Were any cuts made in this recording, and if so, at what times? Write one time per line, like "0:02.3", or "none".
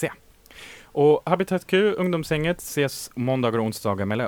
none